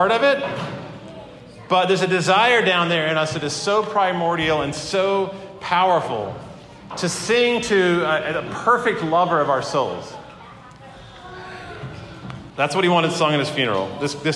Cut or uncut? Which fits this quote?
cut